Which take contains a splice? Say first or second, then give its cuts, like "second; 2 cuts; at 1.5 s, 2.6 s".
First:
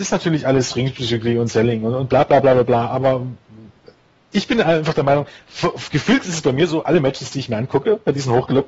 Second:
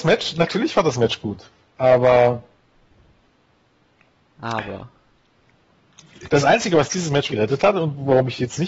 second; 2 cuts; at 6.3 s, 7.3 s